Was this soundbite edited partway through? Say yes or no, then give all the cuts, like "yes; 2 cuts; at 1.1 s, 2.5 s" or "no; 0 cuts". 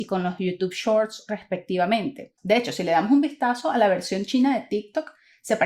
no; 0 cuts